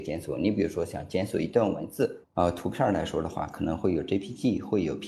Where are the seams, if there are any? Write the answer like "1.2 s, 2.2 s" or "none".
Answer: 2.2 s